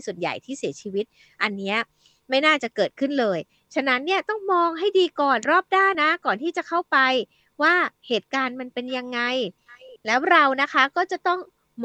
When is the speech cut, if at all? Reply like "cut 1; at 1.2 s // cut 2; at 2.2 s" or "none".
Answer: cut 1; at 5.9 s